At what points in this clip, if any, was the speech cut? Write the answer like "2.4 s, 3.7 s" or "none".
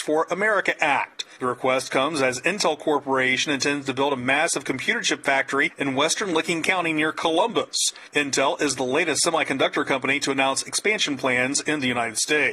none